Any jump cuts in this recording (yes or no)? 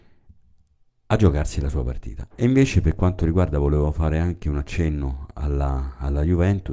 yes